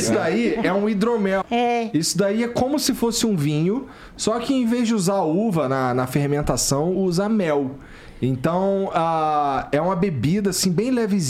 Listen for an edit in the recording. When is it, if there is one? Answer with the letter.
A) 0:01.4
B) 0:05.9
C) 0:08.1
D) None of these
A